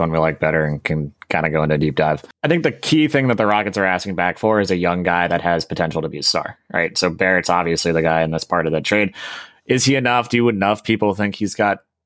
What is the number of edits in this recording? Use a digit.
0